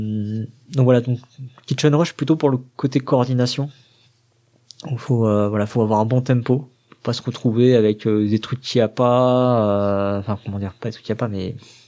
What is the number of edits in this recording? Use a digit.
0